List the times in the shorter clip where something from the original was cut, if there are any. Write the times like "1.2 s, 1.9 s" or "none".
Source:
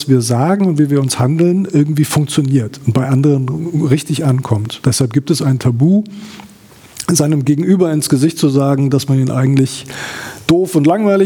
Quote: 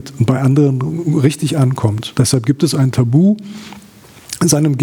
none